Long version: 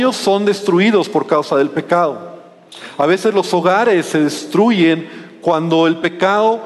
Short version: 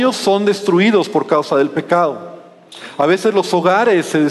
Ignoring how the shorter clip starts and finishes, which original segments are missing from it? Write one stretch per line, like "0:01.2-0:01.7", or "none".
none